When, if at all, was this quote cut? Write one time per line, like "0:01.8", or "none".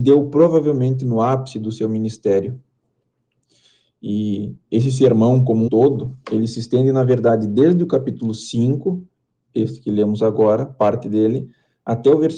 0:05.7